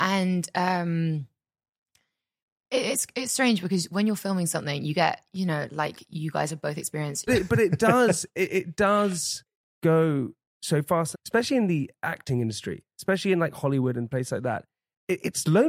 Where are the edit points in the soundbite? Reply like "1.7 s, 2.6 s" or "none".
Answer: 7.3 s, 11.1 s